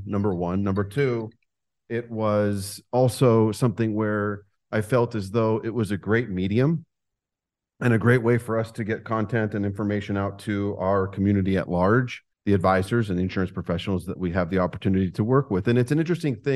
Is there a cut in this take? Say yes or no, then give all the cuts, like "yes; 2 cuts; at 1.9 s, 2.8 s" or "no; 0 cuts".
yes; 1 cut; at 12.3 s